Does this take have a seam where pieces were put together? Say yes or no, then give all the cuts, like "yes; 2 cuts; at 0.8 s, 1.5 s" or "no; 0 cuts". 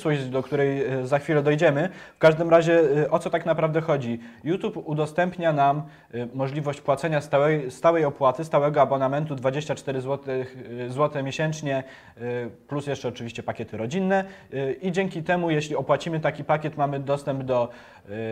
no; 0 cuts